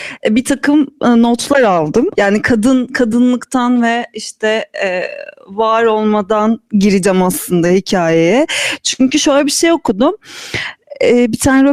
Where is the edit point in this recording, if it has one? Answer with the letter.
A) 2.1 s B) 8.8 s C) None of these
A